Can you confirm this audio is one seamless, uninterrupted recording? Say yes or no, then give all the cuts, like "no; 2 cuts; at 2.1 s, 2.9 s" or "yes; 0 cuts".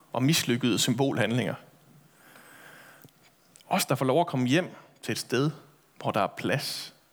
yes; 0 cuts